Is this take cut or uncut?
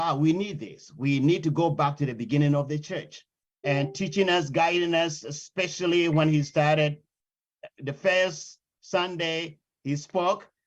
cut